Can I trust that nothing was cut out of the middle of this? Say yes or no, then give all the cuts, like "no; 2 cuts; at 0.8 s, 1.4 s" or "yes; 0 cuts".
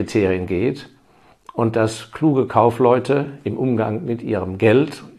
yes; 0 cuts